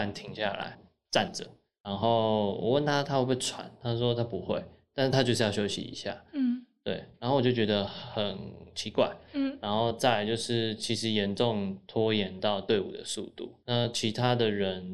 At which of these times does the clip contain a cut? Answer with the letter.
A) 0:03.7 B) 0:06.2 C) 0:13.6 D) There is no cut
C